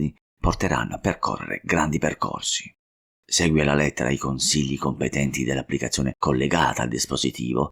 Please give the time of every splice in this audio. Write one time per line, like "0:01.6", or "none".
0:03.0